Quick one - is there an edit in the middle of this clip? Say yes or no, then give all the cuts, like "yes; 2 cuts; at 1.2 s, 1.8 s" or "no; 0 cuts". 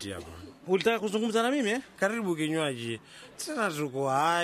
yes; 2 cuts; at 1.9 s, 3.3 s